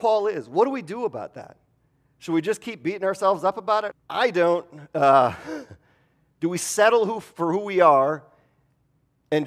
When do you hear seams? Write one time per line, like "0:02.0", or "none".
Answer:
0:03.9